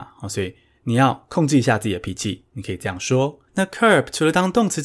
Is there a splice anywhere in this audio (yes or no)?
yes